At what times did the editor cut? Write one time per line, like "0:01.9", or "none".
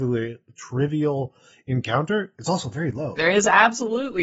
0:03.2